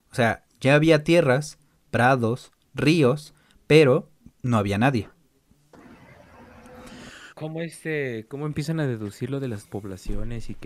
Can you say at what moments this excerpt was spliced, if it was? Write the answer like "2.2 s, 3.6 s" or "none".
7.3 s